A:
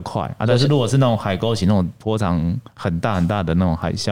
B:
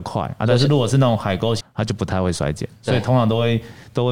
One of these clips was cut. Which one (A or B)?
B